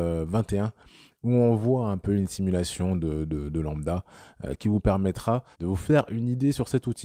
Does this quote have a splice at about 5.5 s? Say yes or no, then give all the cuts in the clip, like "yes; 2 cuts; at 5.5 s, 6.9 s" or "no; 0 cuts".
yes; 1 cut; at 5.5 s